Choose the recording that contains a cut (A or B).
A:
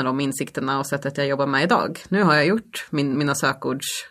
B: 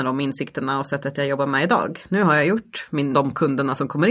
B